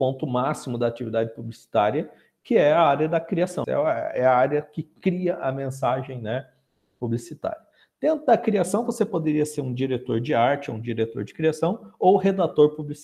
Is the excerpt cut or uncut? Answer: cut